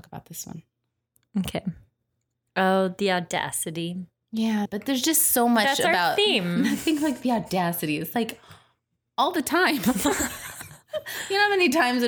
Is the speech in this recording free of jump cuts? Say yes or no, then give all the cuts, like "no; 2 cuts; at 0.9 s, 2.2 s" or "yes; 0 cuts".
no; 1 cut; at 4.7 s